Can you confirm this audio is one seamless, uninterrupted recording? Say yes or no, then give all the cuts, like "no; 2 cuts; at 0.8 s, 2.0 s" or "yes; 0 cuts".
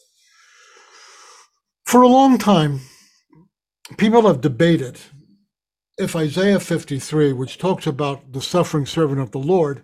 yes; 0 cuts